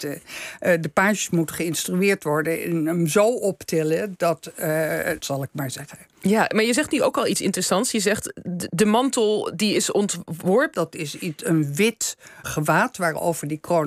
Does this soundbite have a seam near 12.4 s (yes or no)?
yes